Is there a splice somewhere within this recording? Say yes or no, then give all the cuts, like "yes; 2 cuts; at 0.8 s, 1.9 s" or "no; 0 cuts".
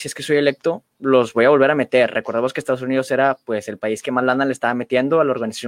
no; 0 cuts